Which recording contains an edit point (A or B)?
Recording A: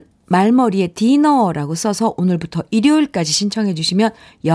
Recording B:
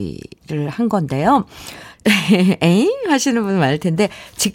B